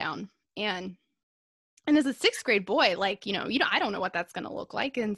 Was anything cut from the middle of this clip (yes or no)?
no